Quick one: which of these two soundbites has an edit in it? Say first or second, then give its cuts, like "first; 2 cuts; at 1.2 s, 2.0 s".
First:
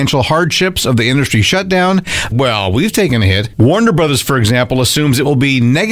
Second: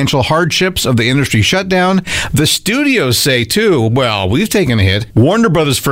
first; 1 cut; at 2.3 s